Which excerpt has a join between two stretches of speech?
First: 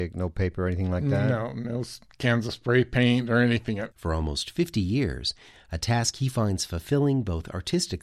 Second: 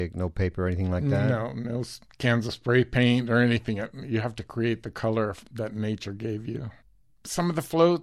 first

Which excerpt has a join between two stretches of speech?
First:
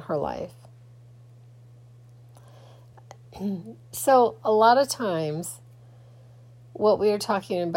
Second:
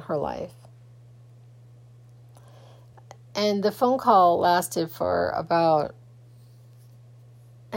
first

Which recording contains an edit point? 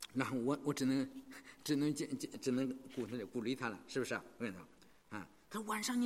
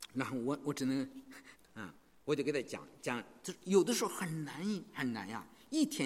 second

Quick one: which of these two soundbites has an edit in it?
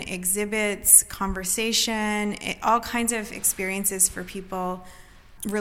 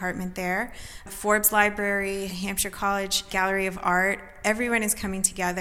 second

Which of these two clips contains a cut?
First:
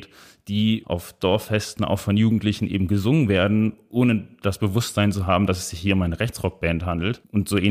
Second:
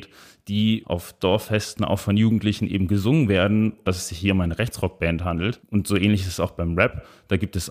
second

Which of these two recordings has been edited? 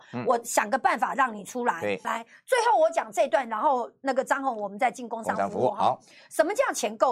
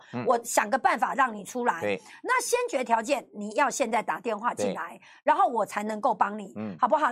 first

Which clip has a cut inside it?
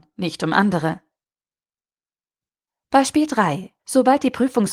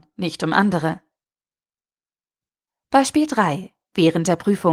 first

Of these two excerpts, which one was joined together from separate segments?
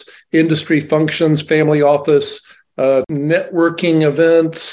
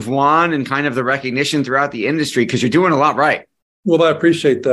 first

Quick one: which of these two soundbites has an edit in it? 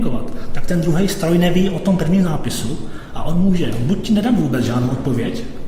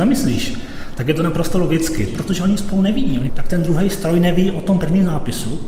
second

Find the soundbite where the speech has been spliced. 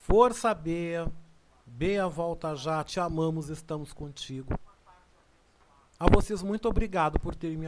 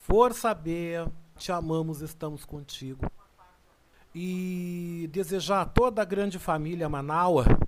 second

